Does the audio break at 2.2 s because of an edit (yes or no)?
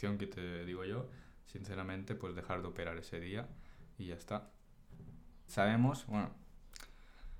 no